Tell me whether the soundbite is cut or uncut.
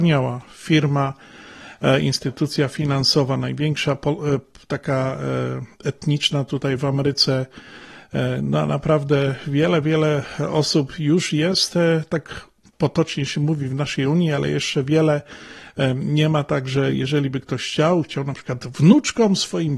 uncut